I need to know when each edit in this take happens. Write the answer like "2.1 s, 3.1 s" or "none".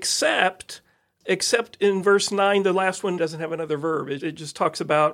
3.2 s, 4.2 s